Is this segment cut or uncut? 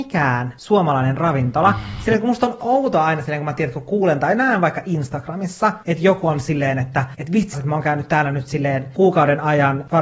cut